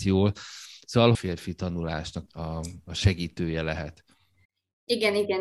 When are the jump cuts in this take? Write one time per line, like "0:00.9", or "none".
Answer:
0:01.1
0:02.3